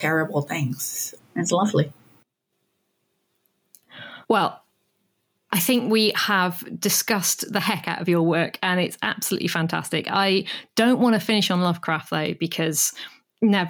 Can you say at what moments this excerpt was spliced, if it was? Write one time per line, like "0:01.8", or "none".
0:01.2
0:04.2

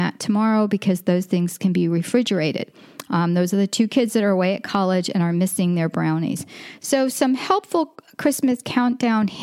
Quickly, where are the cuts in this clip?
0:03.0
0:06.8

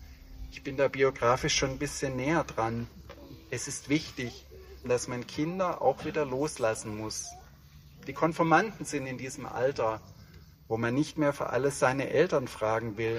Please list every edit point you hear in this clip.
0:04.8
0:10.5

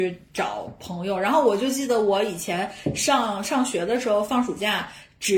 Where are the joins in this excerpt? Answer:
none

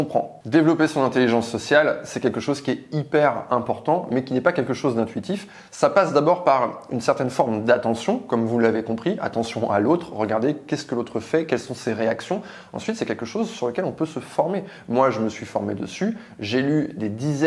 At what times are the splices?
none

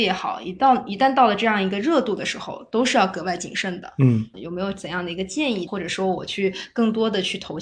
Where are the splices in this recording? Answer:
0:04.3
0:05.7

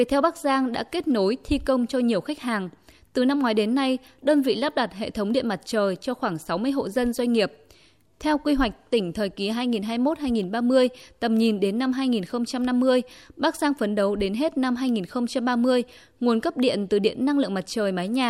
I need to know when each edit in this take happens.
0:08.1

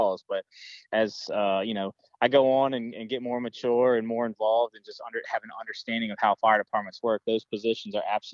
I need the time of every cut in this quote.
none

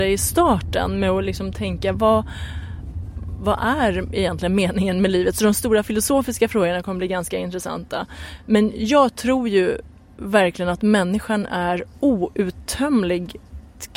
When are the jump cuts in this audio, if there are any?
0:01.9

